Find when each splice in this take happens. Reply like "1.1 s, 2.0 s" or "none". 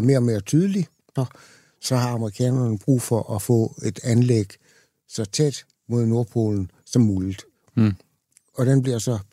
1.2 s, 7.7 s